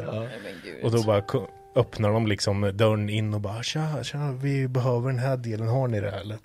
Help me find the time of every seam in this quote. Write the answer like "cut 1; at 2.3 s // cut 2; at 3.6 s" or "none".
none